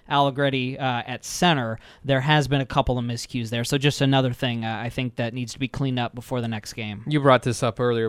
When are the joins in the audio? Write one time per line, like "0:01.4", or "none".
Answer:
none